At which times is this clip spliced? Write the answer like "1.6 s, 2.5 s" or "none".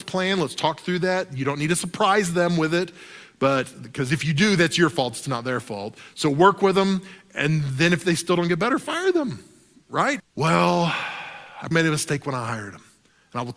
10.2 s, 11.7 s